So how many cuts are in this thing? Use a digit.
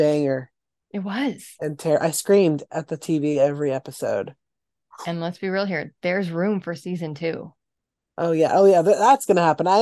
0